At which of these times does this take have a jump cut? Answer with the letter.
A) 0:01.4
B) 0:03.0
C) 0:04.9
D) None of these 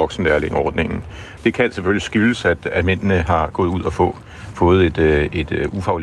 A